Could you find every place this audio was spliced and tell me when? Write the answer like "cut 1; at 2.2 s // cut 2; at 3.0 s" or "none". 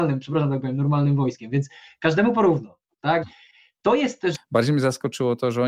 cut 1; at 3.2 s // cut 2; at 4.3 s